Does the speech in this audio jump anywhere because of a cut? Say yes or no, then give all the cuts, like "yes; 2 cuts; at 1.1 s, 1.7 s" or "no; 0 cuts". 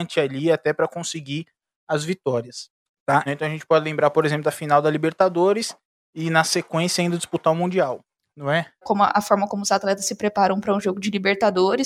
yes; 2 cuts; at 3.3 s, 8.8 s